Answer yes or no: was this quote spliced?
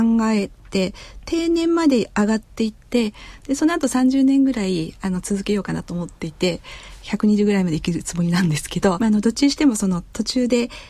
yes